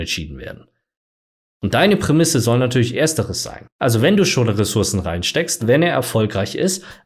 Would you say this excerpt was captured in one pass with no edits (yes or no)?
no